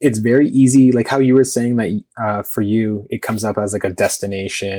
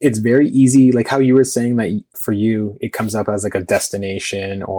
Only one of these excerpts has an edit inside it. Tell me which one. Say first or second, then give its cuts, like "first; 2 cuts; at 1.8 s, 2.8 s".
second; 1 cut; at 2.1 s